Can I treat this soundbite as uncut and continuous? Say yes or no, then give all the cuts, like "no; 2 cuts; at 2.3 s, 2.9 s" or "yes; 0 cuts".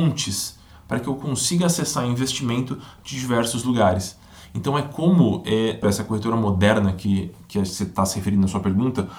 no; 1 cut; at 5.8 s